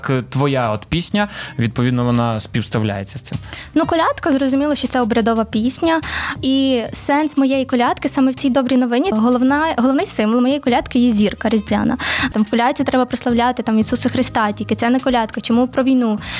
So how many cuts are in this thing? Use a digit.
3